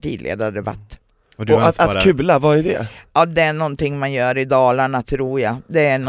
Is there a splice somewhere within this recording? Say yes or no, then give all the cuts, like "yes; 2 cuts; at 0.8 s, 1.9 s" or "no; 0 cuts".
no; 0 cuts